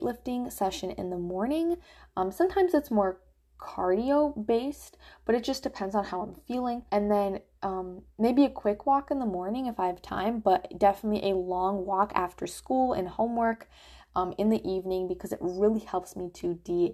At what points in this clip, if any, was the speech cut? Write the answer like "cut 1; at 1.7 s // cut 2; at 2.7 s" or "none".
cut 1; at 6.9 s